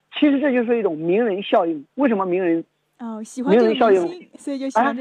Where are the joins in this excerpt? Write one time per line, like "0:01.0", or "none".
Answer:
none